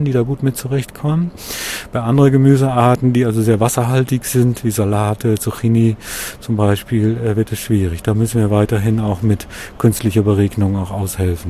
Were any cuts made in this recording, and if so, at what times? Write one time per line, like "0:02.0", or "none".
none